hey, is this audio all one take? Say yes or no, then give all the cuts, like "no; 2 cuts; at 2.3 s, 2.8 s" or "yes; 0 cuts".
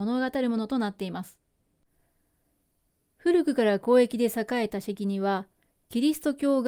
yes; 0 cuts